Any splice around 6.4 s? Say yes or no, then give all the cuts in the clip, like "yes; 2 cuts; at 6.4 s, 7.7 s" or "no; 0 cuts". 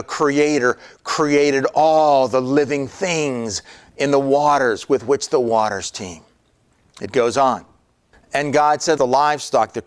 no; 1 cut; at 9.0 s